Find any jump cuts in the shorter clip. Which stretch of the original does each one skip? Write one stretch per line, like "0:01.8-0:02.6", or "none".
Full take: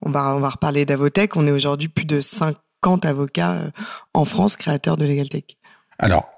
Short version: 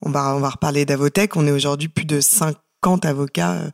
none